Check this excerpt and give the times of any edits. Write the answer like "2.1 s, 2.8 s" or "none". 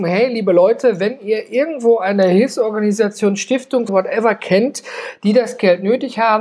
3.9 s